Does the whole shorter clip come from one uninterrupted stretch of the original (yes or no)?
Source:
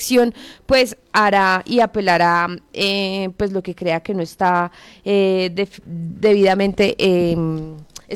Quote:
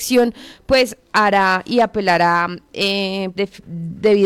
no